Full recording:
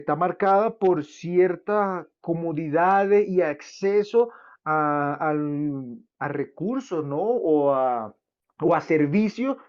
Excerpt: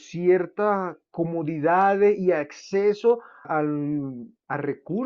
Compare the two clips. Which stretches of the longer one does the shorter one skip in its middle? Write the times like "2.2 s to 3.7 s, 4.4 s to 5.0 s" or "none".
4.5 s to 5.2 s